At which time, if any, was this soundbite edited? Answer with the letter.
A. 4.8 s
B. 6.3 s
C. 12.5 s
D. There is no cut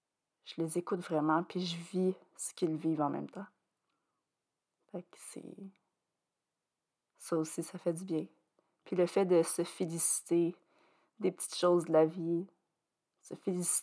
D